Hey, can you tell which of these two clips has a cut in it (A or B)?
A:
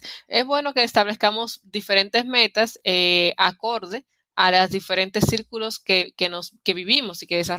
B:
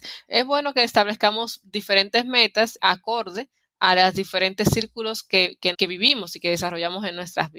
B